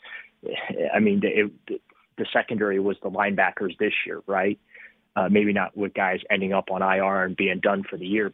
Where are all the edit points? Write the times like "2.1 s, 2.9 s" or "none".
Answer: none